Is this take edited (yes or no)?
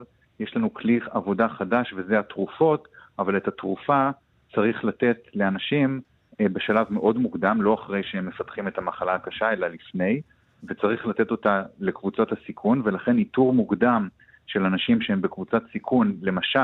no